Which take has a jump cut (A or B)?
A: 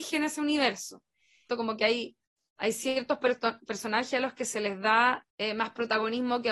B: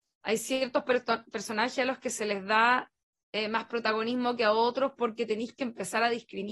A